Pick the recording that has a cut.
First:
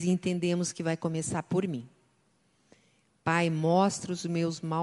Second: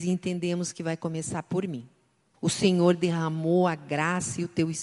second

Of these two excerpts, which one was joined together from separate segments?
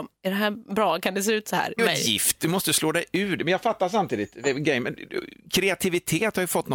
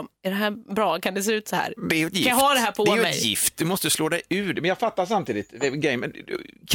first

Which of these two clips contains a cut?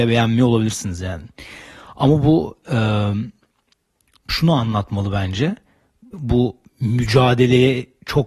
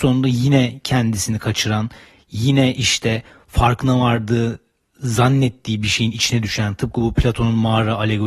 first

